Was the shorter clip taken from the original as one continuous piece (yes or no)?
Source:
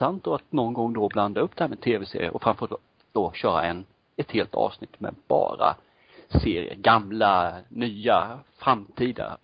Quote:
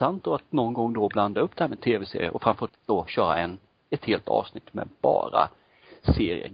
no